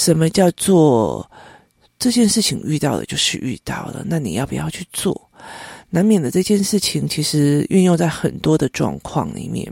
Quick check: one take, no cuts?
yes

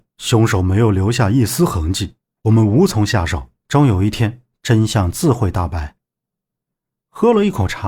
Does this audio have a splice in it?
yes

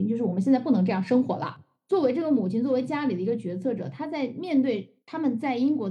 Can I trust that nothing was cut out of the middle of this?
no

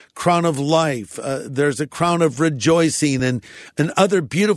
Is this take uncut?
yes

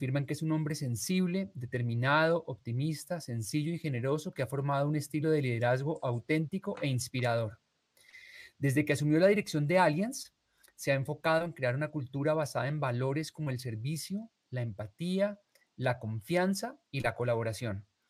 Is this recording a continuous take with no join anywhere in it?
no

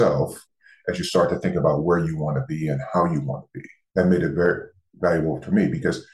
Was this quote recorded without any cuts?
no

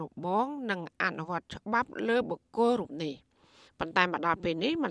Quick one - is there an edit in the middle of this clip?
no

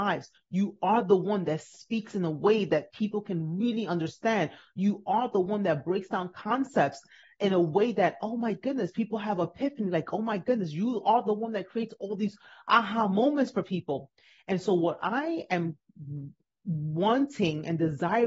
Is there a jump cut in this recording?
no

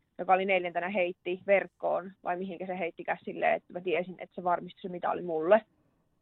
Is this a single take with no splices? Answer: yes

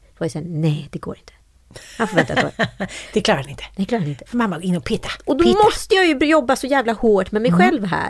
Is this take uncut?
yes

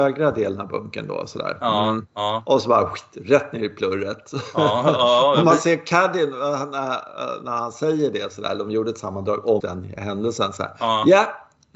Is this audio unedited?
no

